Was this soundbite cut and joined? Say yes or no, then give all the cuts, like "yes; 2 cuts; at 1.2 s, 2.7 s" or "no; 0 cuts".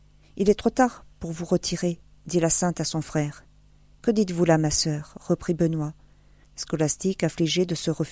yes; 2 cuts; at 4.0 s, 6.4 s